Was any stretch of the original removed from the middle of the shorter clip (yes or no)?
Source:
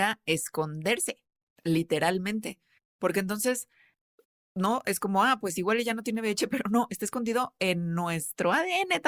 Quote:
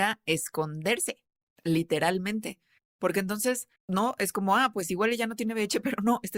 yes